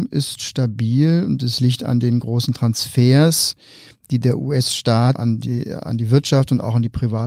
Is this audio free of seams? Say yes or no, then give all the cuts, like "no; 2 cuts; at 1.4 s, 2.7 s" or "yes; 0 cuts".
no; 1 cut; at 5.2 s